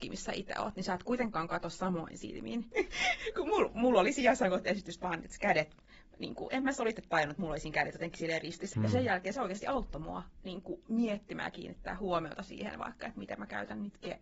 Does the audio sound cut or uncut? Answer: cut